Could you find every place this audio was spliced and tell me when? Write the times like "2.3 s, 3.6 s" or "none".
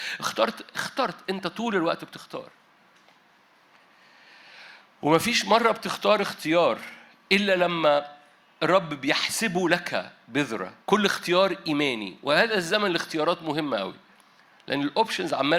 10.8 s